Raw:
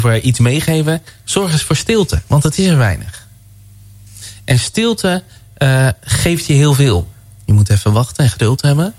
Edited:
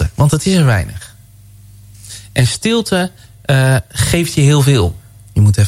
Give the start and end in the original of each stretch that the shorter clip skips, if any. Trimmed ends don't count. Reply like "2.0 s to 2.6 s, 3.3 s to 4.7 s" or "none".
none